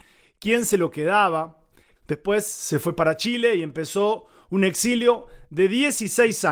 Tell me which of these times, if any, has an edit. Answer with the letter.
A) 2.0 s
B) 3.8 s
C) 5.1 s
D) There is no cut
A